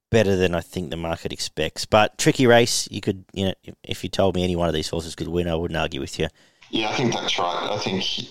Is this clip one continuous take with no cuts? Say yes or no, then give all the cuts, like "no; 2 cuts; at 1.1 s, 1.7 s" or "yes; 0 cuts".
no; 1 cut; at 6.6 s